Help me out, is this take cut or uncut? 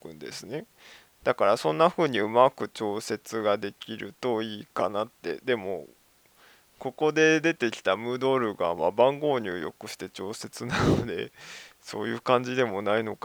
uncut